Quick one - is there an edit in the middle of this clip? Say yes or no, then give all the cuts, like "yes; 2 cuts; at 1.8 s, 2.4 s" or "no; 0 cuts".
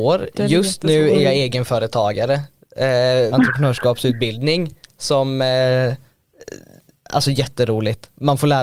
yes; 1 cut; at 3.3 s